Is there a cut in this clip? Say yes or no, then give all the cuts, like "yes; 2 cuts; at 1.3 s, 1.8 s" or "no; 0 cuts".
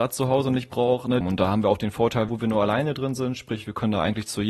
yes; 2 cuts; at 1.2 s, 2.3 s